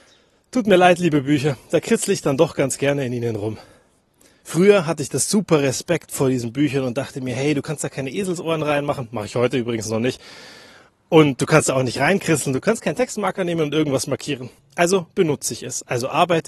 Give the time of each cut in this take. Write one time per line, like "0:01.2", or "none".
0:14.6